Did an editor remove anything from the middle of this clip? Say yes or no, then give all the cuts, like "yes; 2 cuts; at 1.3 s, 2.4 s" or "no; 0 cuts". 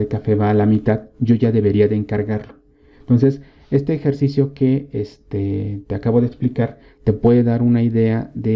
no; 0 cuts